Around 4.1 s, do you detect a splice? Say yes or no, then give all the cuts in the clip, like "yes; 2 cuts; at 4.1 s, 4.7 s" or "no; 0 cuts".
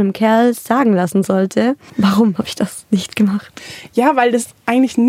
no; 1 cut; at 1.9 s